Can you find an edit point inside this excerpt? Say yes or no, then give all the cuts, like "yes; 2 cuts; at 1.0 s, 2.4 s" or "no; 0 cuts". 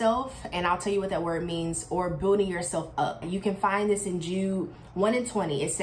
yes; 1 cut; at 3.2 s